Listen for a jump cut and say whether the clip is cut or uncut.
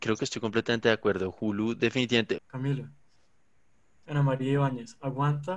cut